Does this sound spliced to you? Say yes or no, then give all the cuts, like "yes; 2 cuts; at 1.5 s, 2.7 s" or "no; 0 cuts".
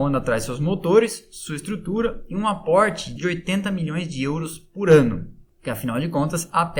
yes; 1 cut; at 3.2 s